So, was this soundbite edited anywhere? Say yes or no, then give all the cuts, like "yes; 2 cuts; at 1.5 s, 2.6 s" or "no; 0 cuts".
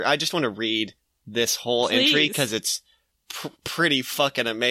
no; 0 cuts